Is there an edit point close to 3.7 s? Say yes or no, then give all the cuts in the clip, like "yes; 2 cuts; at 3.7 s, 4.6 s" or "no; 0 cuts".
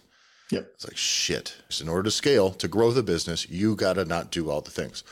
no; 1 cut; at 1.7 s